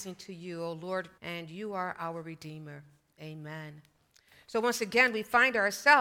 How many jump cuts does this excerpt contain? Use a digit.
1